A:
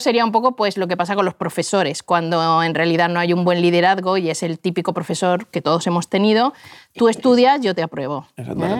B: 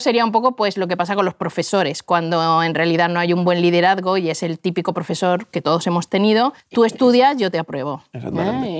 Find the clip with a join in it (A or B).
B